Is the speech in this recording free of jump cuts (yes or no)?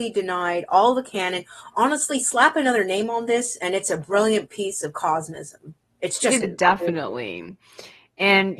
no